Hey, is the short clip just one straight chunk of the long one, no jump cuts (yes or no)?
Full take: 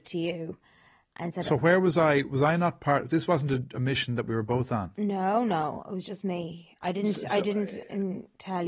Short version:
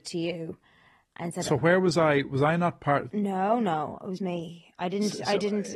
no